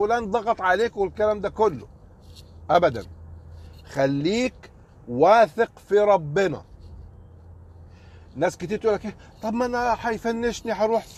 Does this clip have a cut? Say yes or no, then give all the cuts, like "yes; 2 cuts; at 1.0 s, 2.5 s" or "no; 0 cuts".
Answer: no; 0 cuts